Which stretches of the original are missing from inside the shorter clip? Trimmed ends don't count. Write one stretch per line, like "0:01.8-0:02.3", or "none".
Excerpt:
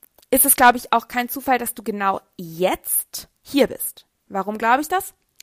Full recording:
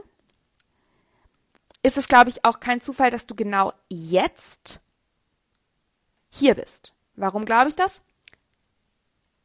0:04.9-0:06.2

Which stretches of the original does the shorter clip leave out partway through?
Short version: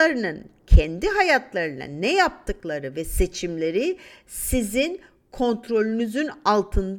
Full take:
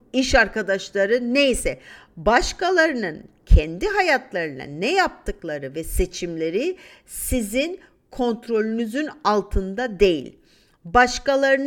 none

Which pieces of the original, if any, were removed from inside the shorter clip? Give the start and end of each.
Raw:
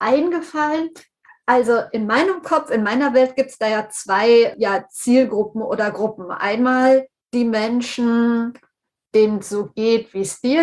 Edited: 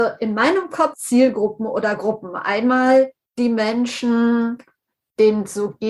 0:02.7-0:04.9

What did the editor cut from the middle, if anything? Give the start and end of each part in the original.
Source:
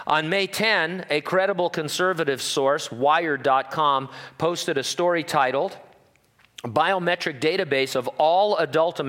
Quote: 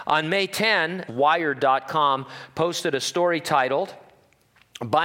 0:01.1-0:02.9

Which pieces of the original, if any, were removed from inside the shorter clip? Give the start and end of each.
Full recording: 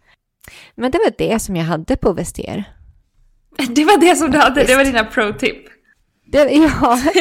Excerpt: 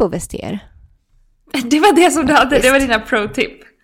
none

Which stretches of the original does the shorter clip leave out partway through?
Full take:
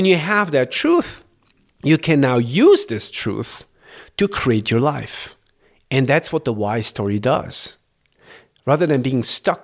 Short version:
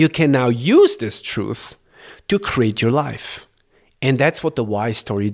none

